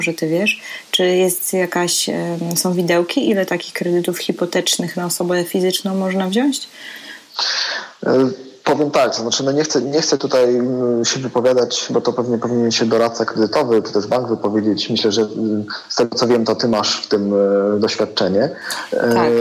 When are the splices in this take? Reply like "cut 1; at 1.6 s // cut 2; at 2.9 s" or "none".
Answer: cut 1; at 15.1 s